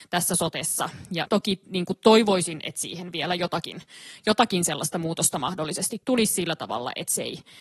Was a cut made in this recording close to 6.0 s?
yes; 2 cuts; at 1.3 s, 6.0 s

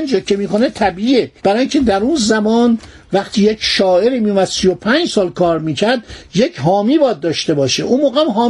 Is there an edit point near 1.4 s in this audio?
yes; 1 cut; at 1.4 s

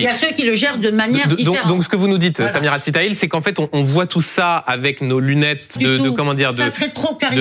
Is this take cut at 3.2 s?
no; 1 cut; at 5.8 s

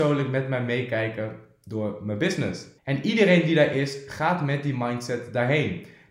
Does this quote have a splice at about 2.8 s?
yes; 1 cut; at 2.8 s

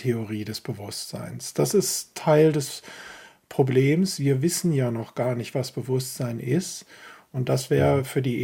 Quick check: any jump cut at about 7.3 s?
yes; 1 cut; at 7.3 s

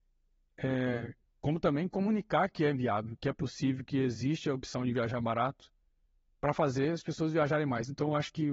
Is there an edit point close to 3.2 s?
no; 0 cuts

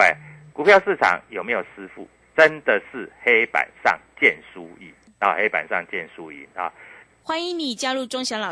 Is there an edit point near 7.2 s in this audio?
yes; 1 cut; at 7.2 s

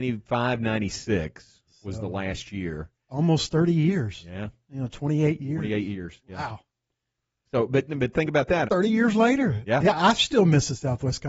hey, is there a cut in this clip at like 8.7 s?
yes; 1 cut; at 8.7 s

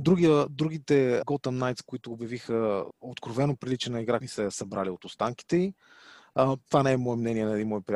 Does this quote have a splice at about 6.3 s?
no; 3 cuts; at 1.2 s, 2.9 s, 4.2 s

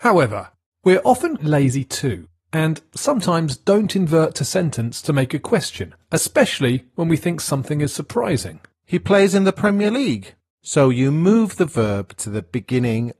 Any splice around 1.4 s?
yes; 2 cuts; at 1.4 s, 10.5 s

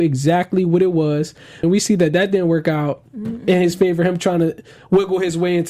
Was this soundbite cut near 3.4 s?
no; 1 cut; at 1.6 s

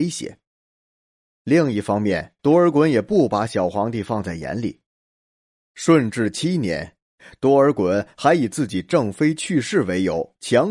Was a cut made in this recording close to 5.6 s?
no; 1 cut; at 2.4 s

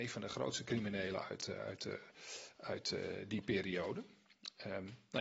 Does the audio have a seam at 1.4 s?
no; 0 cuts

